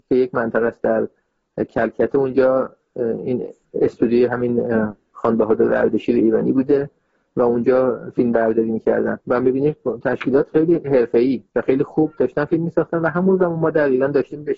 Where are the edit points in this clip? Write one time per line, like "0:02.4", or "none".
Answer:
0:09.2
0:11.5